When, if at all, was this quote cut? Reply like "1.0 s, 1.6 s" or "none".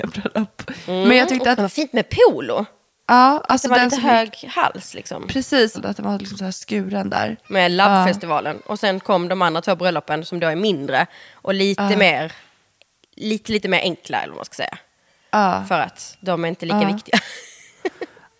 1.5 s, 5.7 s, 7.4 s